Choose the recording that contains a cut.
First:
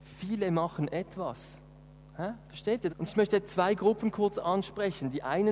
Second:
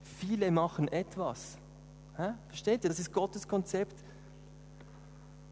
first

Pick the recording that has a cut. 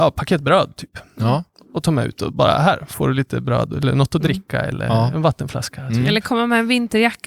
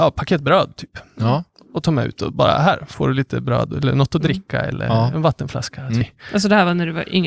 second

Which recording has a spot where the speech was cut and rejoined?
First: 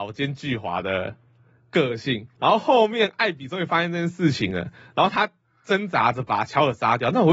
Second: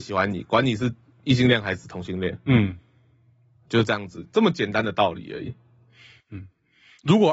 first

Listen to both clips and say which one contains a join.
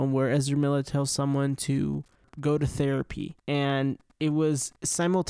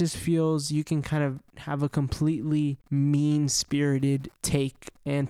second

